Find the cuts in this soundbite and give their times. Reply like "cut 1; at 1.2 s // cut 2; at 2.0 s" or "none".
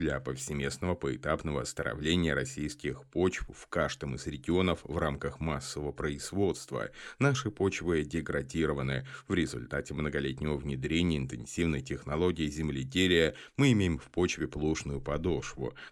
none